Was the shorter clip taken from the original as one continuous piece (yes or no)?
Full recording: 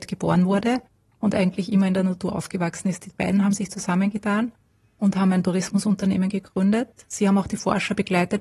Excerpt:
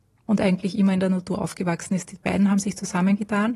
yes